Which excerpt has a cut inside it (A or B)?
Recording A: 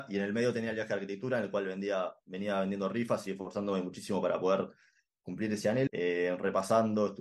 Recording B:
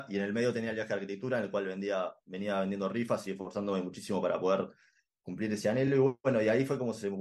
A